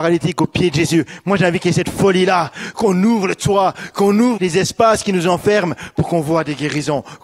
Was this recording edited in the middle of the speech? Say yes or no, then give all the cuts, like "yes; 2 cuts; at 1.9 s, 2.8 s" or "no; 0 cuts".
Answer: yes; 1 cut; at 4.4 s